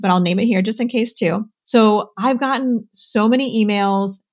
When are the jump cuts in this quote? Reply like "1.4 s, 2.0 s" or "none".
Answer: 1.6 s